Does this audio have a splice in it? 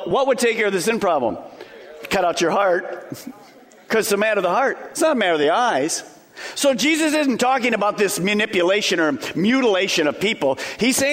no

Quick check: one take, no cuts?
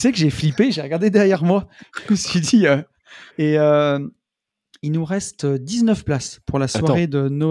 no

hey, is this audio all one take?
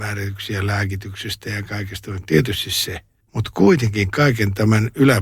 yes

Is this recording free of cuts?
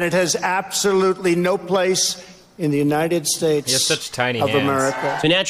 yes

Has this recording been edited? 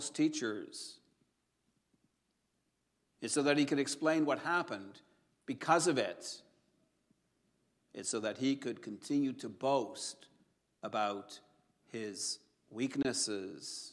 yes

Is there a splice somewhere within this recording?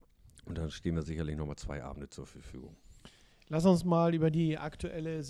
no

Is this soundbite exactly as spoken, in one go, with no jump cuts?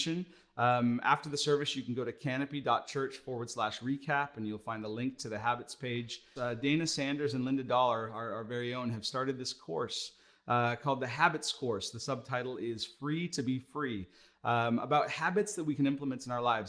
no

